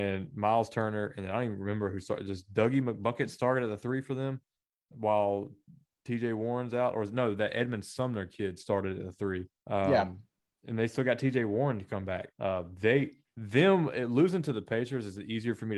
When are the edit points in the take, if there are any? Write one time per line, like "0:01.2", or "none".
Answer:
0:09.6
0:12.3